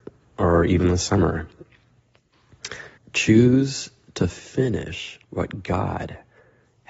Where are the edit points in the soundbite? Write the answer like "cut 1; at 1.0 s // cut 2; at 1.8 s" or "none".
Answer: cut 1; at 3.0 s // cut 2; at 5.2 s